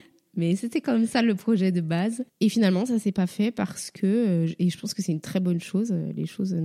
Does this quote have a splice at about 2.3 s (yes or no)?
no